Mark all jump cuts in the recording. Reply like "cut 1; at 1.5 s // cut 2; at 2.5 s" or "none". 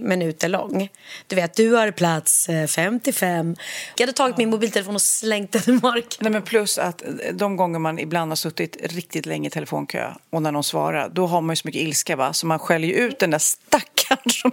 cut 1; at 4.0 s